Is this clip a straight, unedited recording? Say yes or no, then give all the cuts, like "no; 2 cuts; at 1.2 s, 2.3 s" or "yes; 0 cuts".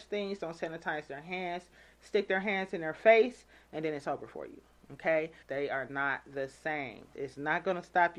no; 2 cuts; at 5.4 s, 7.1 s